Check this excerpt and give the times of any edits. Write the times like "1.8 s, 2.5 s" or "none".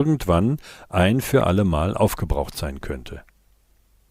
none